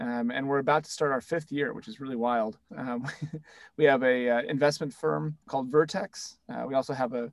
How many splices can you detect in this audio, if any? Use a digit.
2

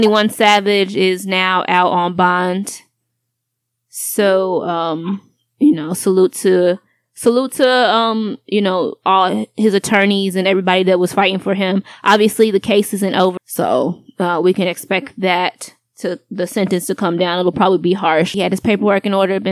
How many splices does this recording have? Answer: 2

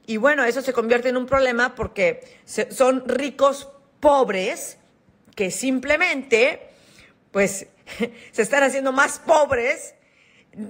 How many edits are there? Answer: 0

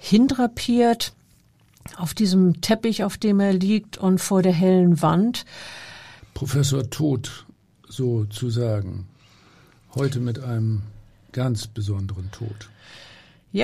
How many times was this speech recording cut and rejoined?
1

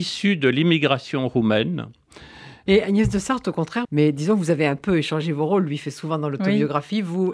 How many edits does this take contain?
2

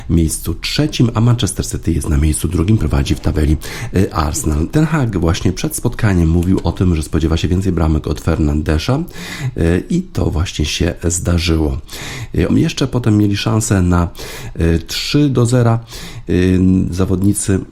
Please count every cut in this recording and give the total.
2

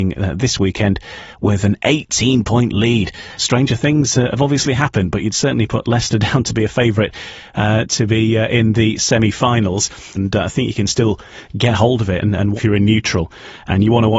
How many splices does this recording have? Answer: 3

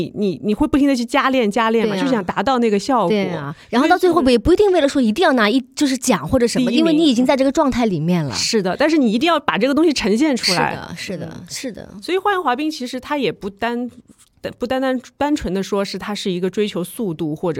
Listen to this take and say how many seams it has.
0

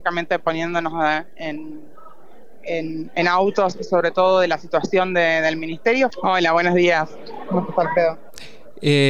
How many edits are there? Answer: 1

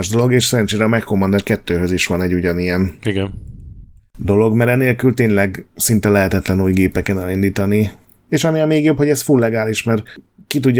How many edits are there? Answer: 0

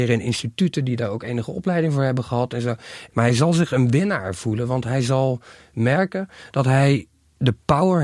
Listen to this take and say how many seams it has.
1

